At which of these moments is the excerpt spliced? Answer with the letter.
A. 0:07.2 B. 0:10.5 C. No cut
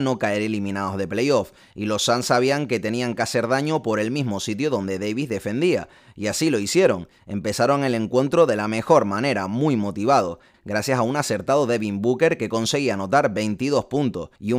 B